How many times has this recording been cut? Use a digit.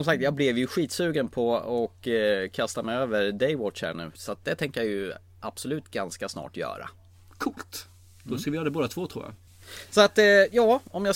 0